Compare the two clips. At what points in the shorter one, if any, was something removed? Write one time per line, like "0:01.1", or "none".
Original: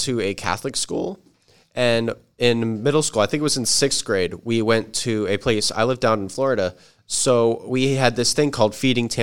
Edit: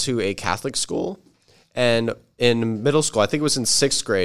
none

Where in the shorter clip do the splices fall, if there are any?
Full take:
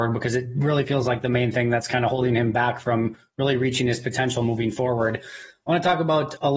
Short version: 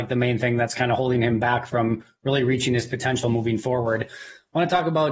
none

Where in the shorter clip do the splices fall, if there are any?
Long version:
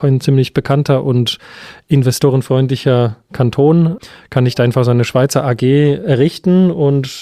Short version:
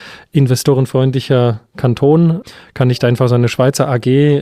none

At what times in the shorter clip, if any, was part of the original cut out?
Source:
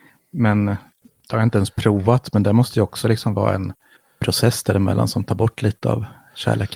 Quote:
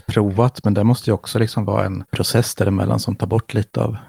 0:02.1

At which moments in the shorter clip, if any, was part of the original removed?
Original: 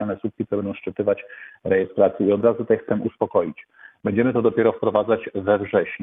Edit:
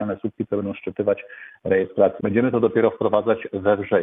0:02.2

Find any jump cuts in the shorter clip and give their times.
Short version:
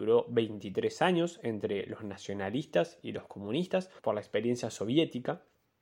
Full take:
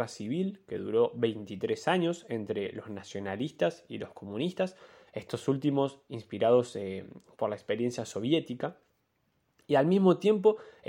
0:04.0

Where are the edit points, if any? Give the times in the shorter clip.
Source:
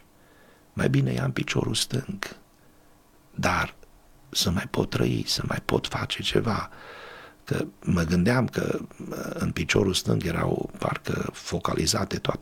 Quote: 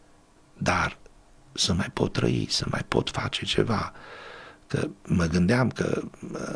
none

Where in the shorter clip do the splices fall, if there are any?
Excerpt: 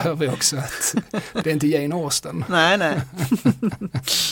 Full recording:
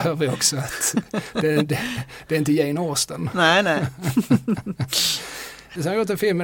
0:01.4

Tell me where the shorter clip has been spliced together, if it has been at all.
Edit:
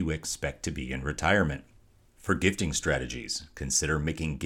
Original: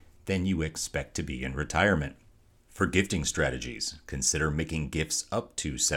none

